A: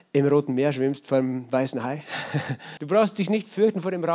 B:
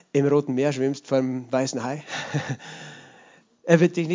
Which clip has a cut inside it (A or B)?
A